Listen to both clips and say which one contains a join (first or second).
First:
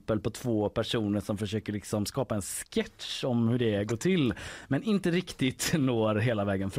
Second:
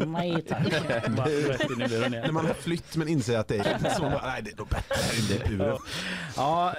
second